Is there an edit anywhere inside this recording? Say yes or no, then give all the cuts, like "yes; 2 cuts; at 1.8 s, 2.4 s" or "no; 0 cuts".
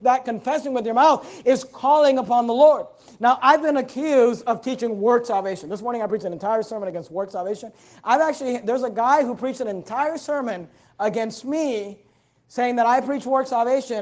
yes; 1 cut; at 3.4 s